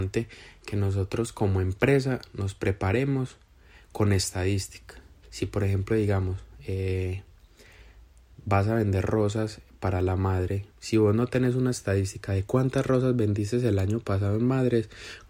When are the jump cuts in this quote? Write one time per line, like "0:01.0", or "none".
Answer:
0:05.2
0:10.7